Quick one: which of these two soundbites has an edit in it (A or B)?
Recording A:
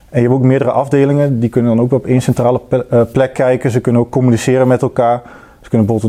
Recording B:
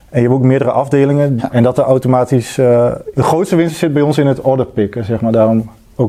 B